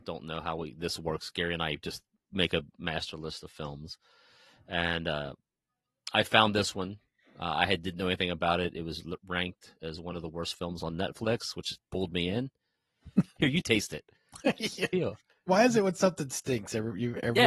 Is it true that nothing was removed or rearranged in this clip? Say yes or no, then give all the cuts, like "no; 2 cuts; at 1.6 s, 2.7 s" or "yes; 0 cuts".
no; 2 cuts; at 13.4 s, 14.9 s